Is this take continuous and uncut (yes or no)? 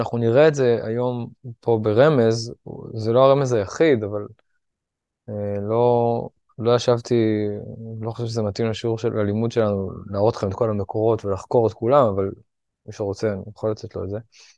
yes